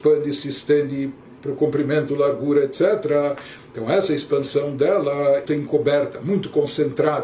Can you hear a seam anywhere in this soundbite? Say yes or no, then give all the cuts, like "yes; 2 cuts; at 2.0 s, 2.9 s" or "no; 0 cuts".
yes; 2 cuts; at 3.6 s, 5.5 s